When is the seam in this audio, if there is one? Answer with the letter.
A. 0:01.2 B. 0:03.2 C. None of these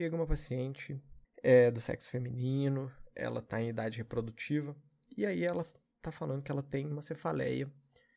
A